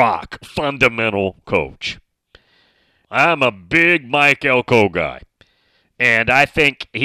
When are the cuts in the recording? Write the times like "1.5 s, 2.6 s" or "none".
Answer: 3.0 s